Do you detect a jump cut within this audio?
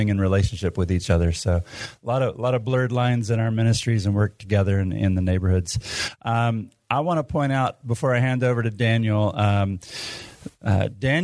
no; 0 cuts

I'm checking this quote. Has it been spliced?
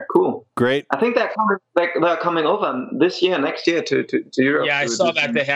no; 0 cuts

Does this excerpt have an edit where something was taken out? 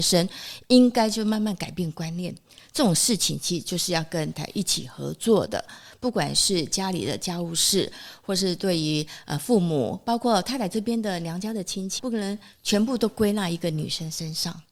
yes; 2 cuts; at 4.3 s, 12.0 s

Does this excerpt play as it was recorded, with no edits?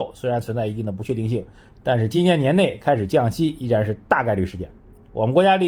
yes; 0 cuts

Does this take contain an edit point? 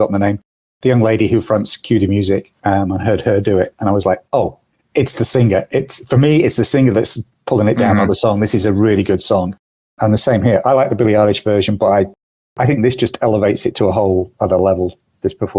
no; 0 cuts

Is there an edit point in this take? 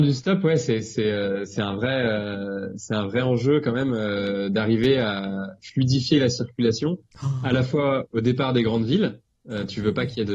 no; 0 cuts

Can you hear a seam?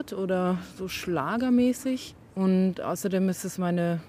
no; 0 cuts

